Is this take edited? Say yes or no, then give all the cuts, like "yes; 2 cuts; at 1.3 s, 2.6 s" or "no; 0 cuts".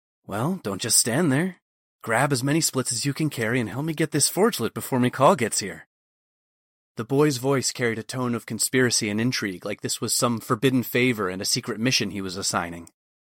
no; 0 cuts